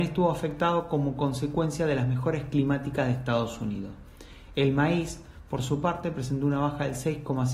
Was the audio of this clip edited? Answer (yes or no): no